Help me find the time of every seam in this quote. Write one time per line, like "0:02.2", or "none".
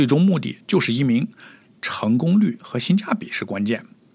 none